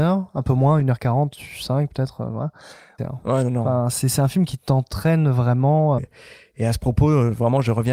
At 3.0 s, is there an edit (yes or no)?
yes